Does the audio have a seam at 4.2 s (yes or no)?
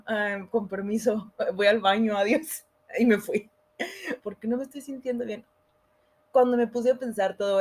yes